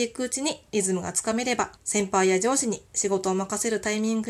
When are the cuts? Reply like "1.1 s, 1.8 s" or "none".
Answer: 1.8 s